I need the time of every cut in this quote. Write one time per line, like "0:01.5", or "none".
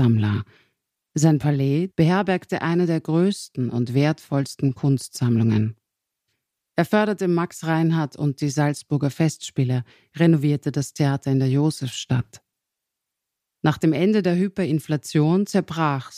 0:01.9